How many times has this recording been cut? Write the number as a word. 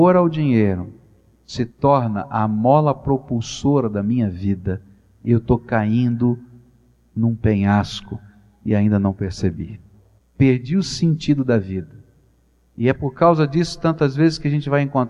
zero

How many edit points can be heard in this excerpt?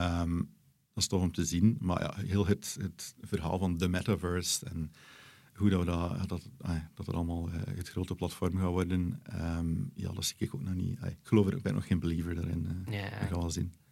zero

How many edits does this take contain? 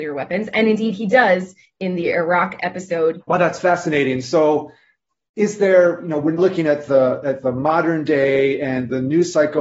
two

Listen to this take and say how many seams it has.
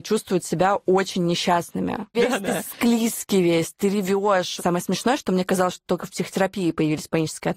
two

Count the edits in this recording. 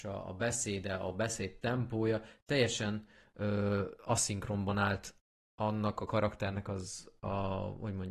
zero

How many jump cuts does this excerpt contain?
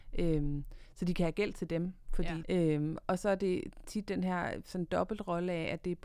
one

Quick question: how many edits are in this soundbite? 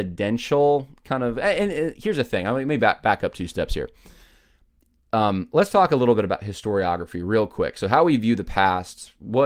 zero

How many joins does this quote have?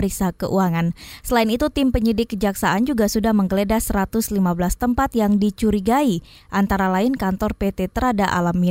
zero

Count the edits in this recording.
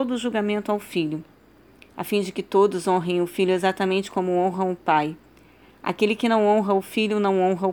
zero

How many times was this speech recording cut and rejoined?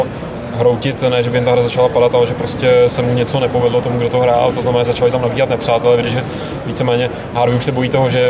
two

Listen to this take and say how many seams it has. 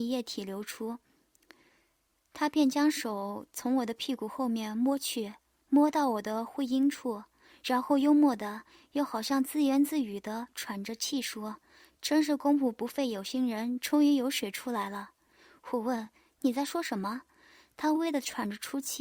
one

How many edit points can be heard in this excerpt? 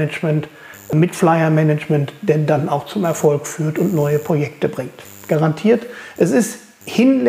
zero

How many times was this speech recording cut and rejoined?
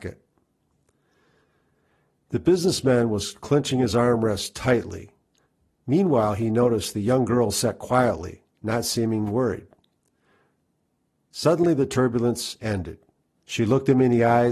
one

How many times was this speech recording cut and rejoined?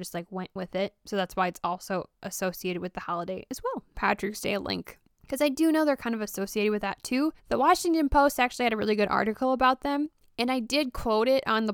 two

